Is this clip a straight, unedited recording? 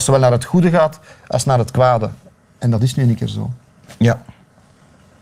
yes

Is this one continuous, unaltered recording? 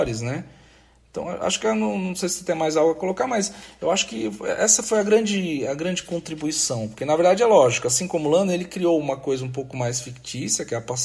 yes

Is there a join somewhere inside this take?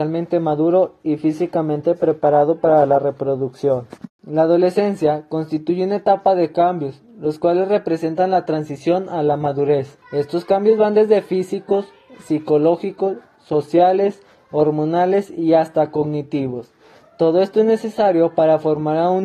yes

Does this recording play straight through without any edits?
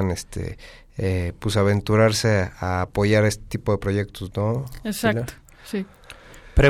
yes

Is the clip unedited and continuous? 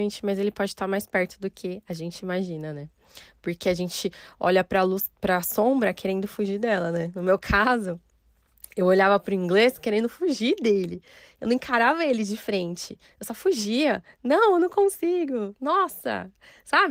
yes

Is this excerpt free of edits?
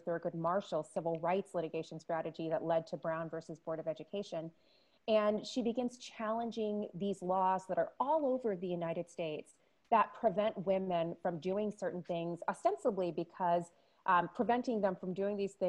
yes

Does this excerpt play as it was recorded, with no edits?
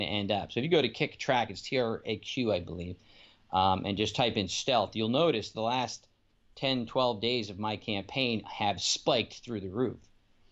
yes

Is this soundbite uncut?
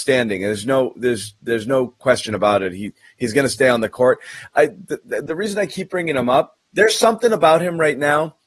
yes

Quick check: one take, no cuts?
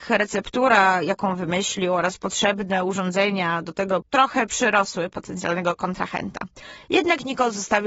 no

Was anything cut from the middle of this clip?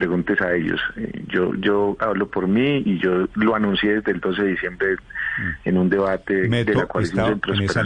no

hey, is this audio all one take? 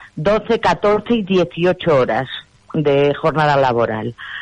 yes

